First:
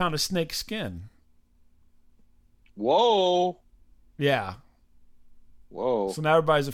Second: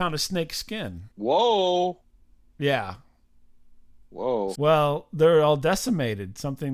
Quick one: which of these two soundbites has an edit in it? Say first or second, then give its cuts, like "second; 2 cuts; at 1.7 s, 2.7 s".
second; 2 cuts; at 1.1 s, 4.5 s